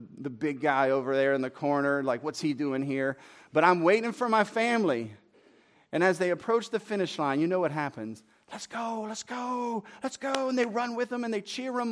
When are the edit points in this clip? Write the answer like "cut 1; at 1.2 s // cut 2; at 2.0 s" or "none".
none